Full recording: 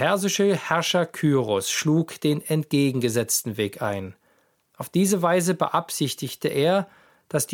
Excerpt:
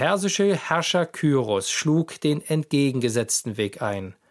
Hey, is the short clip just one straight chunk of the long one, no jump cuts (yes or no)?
yes